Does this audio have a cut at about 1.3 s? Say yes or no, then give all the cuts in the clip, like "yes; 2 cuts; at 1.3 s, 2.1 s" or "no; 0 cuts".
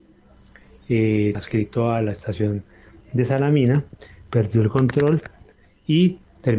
yes; 1 cut; at 1.3 s